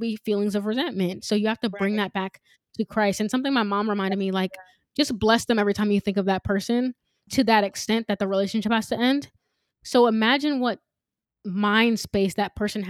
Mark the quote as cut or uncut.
cut